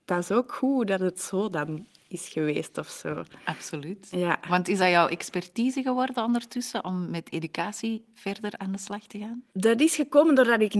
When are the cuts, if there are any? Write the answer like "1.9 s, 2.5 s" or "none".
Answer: 9.5 s